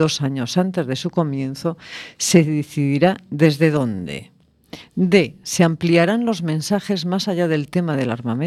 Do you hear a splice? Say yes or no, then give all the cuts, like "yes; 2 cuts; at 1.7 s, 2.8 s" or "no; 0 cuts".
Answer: no; 0 cuts